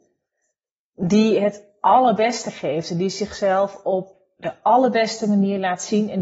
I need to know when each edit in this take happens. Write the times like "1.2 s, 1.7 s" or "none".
none

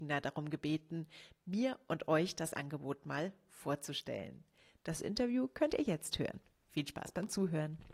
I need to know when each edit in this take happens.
none

